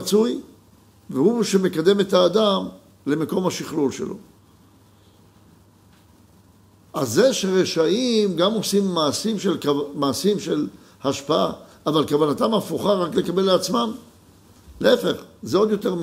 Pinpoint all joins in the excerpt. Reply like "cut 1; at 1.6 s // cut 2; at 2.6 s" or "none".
none